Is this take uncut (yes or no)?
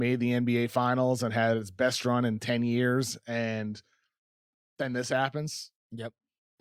yes